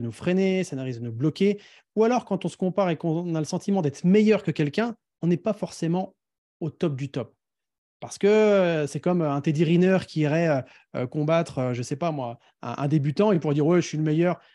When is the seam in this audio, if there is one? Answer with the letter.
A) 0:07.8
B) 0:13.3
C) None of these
C